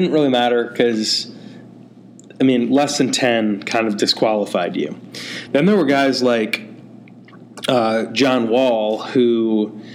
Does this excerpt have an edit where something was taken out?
no; 0 cuts

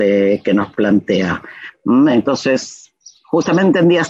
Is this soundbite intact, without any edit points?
yes; 0 cuts

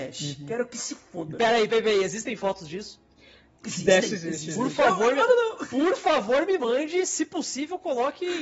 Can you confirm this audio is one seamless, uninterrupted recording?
no; 1 cut; at 1.7 s

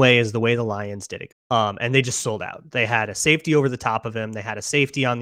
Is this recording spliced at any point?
yes; 1 cut; at 1.3 s

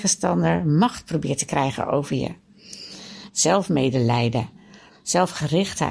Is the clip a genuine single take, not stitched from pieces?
no; 2 cuts; at 3.3 s, 4.9 s

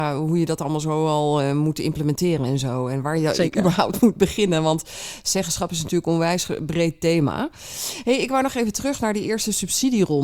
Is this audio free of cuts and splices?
yes; 0 cuts

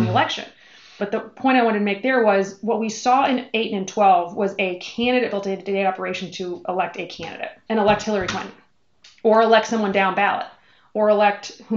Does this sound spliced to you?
yes; 2 cuts; at 1.0 s, 7.7 s

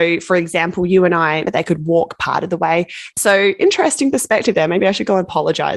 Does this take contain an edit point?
yes; 2 cuts; at 1.4 s, 3.1 s

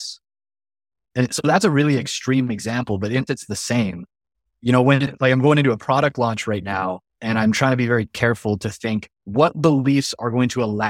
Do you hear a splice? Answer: yes; 2 cuts; at 3.3 s, 9.1 s

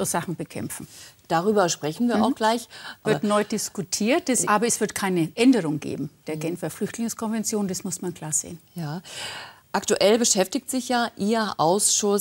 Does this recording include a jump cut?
yes; 2 cuts; at 3.0 s, 4.4 s

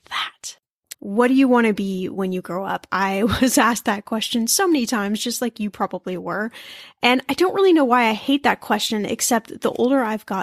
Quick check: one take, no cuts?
no; 1 cut; at 0.9 s

